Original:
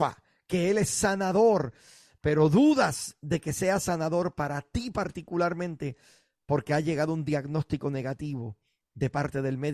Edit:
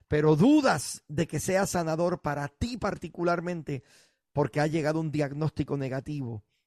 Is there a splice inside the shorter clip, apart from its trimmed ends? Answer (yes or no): no